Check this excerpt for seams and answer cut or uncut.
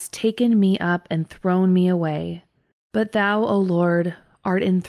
cut